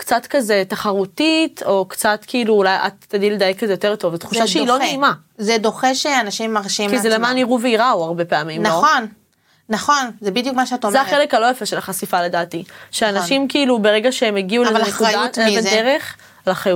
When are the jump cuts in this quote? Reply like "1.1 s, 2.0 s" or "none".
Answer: none